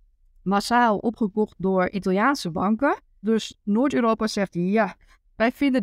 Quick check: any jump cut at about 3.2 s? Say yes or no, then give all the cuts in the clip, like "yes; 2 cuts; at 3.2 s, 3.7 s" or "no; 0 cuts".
yes; 1 cut; at 3.2 s